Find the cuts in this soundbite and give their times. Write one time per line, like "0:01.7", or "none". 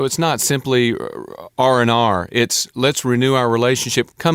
none